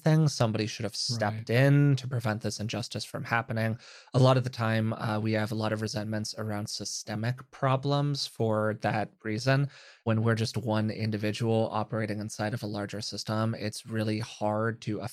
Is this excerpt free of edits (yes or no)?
yes